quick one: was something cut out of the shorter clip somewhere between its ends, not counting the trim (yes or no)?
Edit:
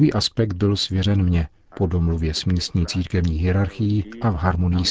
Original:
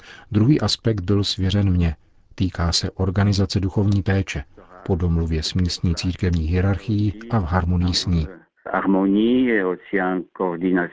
yes